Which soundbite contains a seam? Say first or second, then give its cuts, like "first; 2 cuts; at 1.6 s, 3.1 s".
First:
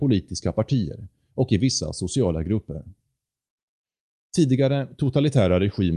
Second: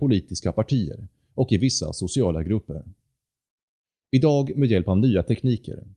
second; 1 cut; at 4.0 s